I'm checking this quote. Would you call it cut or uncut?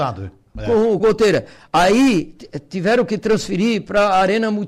cut